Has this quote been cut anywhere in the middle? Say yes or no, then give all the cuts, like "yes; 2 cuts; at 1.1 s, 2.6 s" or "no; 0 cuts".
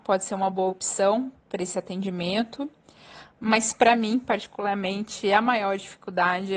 no; 0 cuts